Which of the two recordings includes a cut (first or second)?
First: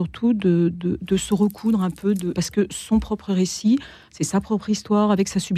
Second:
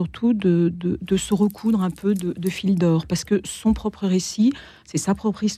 first